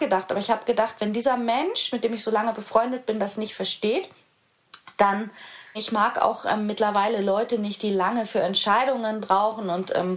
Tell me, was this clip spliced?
yes; 1 cut; at 5.7 s

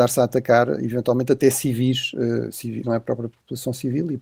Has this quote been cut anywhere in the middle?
yes; 1 cut; at 2.8 s

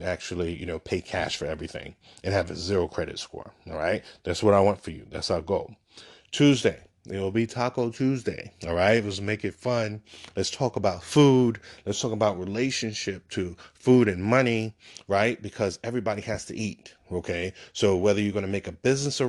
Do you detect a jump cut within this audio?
no; 0 cuts

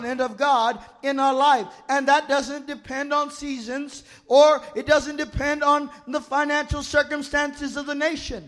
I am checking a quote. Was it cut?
no; 0 cuts

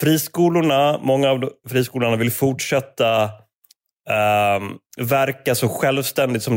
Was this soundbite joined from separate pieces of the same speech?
no; 0 cuts

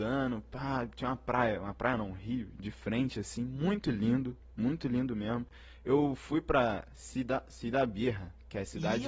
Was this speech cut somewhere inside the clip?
no; 0 cuts

